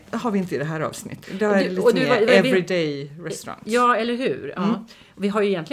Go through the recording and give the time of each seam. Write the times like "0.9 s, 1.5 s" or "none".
1.2 s